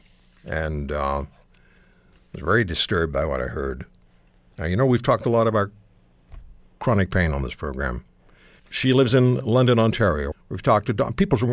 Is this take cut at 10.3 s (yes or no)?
yes